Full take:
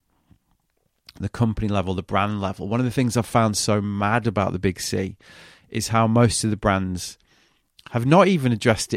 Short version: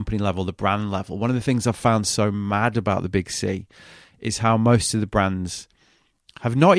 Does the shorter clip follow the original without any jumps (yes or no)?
yes